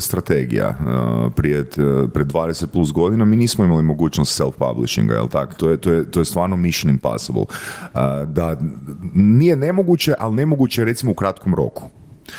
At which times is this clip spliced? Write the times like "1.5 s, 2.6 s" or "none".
5.6 s